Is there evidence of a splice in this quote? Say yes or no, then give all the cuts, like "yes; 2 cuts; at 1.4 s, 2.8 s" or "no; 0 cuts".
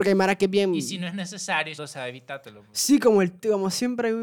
yes; 1 cut; at 1.8 s